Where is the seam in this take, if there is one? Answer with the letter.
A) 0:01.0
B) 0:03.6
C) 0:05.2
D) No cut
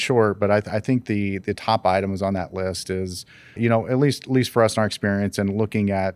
B